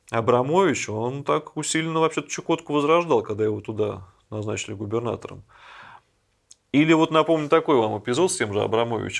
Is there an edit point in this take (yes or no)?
no